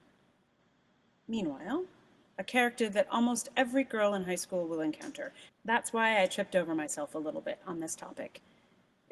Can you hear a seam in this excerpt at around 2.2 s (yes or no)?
yes